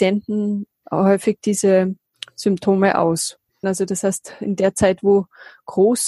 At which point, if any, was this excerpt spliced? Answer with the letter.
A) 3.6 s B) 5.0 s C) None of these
A